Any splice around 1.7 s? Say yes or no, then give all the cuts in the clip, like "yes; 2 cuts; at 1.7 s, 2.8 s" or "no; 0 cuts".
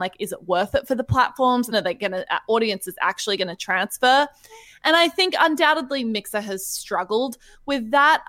yes; 1 cut; at 1.7 s